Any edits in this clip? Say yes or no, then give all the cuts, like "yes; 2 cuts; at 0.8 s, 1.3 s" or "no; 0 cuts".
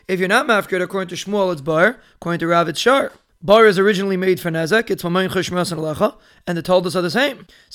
no; 0 cuts